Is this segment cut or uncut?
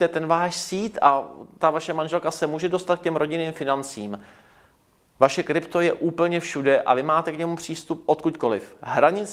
uncut